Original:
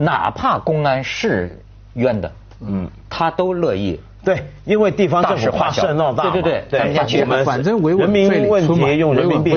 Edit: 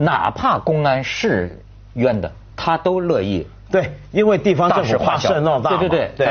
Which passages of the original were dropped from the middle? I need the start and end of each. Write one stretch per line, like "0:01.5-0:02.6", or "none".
0:02.5-0:03.0